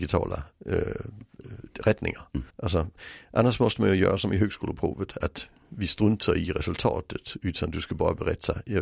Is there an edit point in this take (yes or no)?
yes